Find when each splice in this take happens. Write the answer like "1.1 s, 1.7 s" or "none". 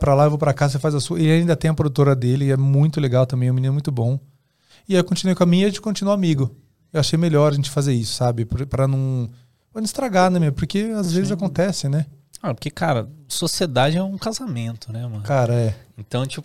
none